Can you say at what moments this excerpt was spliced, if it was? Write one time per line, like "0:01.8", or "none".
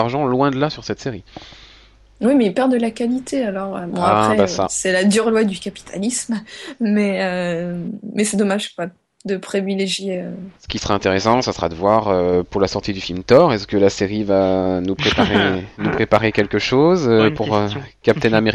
none